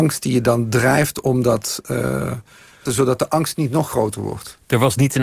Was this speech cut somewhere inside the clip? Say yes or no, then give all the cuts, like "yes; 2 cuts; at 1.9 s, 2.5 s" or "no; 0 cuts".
yes; 1 cut; at 2.9 s